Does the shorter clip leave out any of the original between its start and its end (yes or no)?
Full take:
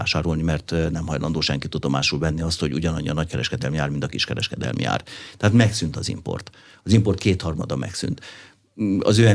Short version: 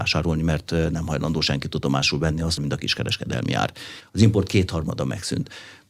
yes